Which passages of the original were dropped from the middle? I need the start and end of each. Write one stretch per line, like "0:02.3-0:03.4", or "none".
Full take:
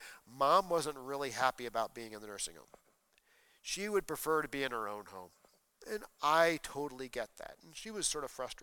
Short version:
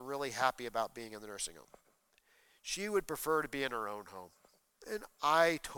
none